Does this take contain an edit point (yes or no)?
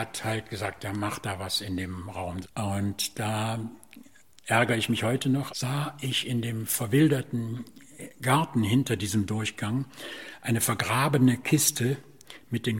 yes